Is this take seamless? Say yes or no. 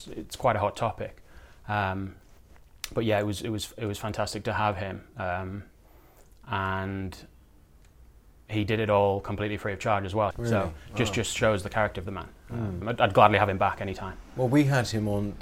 no